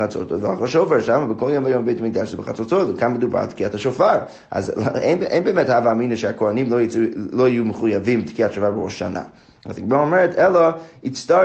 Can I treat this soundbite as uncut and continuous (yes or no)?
no